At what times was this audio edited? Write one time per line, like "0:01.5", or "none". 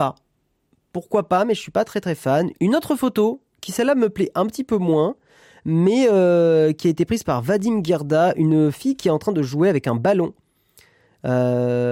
0:02.5